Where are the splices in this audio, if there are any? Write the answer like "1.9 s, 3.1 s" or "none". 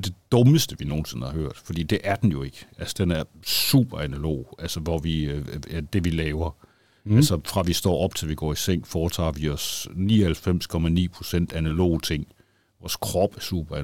none